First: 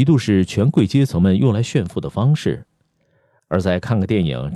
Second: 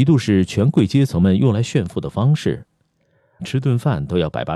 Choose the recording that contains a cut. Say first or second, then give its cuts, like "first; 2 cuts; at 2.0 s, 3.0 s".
second; 1 cut; at 3.4 s